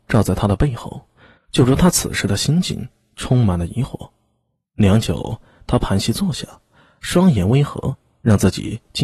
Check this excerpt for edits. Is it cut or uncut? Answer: cut